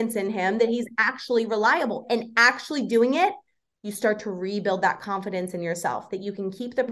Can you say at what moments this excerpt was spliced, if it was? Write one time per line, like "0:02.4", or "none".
0:02.0